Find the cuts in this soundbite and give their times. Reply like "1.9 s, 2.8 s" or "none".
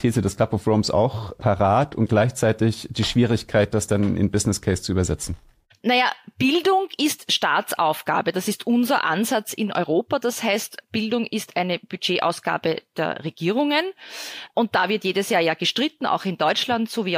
none